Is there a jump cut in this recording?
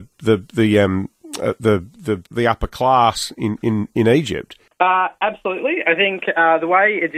yes; 2 cuts; at 2.3 s, 4.7 s

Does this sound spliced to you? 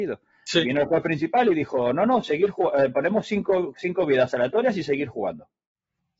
no; 0 cuts

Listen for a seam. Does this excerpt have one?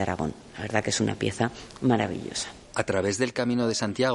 yes; 1 cut; at 2.6 s

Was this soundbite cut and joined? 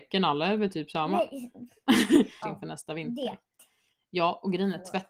yes; 1 cut; at 2.4 s

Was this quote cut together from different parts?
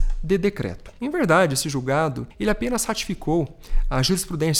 yes; 1 cut; at 1.0 s

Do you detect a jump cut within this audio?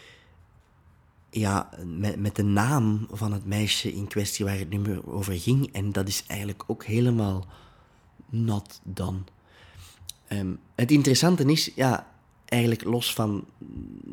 no; 0 cuts

